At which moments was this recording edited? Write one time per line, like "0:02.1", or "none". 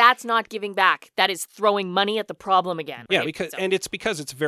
0:03.1